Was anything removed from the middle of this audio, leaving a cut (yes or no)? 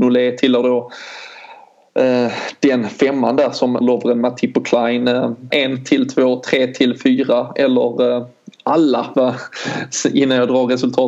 yes